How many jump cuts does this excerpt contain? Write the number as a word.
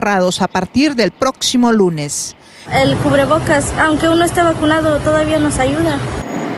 two